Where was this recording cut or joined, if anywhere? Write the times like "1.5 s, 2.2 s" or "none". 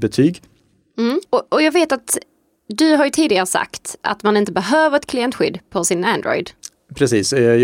1.3 s